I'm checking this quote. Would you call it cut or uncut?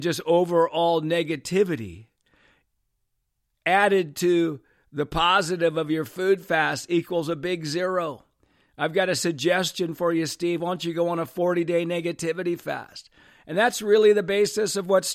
uncut